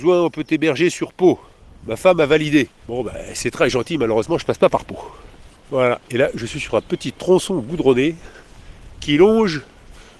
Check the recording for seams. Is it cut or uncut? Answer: cut